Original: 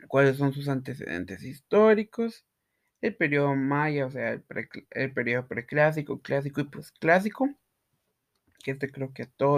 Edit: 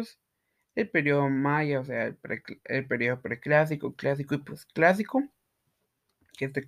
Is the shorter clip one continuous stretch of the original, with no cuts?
yes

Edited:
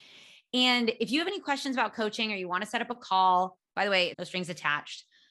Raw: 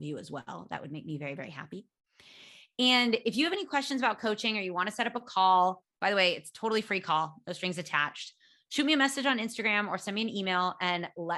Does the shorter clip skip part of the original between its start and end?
yes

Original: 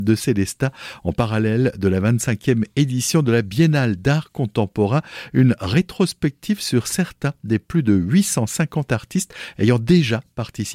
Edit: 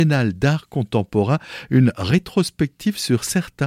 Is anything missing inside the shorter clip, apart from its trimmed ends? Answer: no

